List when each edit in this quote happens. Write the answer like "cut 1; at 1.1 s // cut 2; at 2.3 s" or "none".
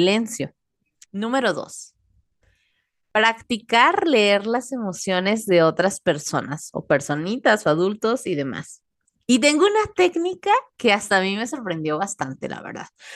cut 1; at 1.0 s